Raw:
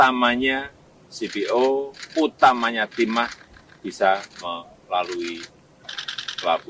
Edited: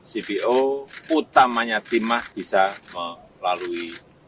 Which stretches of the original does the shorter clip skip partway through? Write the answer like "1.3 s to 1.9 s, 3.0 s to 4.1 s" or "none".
3.4 s to 3.8 s